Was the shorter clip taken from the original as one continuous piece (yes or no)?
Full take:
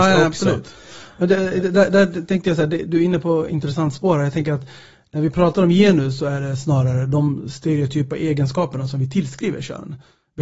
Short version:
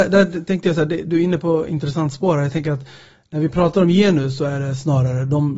yes